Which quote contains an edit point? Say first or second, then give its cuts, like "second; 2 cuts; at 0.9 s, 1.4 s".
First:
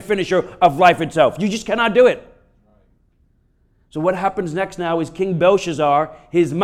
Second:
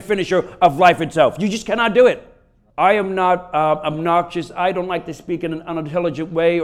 second; 1 cut; at 2.7 s